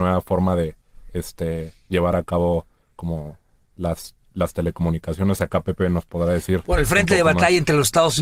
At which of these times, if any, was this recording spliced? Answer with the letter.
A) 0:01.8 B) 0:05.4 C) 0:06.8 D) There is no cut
D